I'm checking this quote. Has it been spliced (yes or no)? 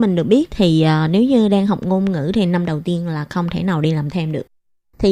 no